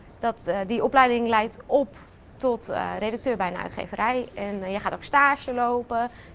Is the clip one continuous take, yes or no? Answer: yes